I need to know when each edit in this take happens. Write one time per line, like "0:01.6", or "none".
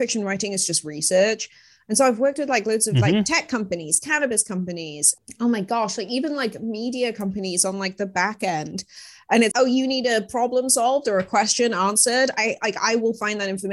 0:09.5